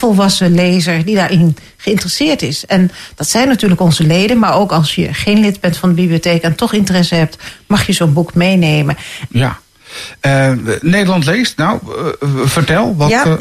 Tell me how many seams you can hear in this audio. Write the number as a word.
one